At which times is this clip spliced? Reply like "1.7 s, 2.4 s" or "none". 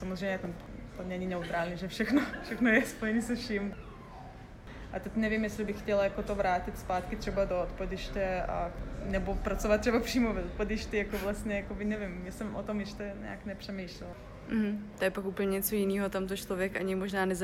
none